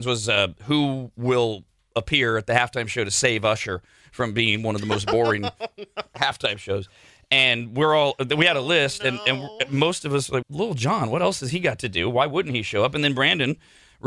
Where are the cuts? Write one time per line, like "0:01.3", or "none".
0:10.4